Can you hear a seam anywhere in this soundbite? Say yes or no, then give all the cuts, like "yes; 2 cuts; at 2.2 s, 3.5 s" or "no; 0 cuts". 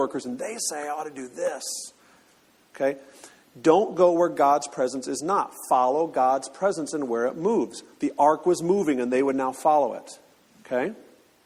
no; 0 cuts